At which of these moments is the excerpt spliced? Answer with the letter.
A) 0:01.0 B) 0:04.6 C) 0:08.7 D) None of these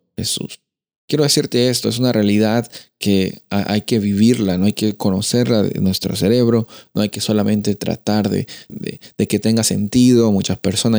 C